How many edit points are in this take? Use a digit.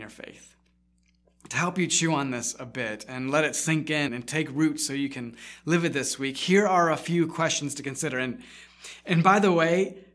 1